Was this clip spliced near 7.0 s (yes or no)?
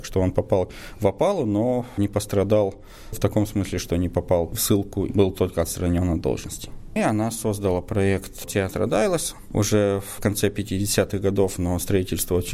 yes